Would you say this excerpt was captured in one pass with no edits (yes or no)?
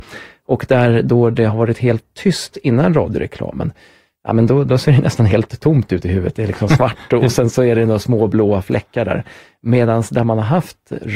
yes